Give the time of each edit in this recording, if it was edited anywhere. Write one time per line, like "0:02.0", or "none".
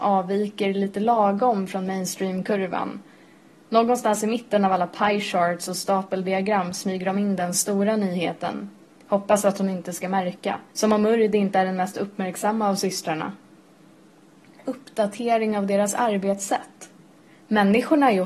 0:10.7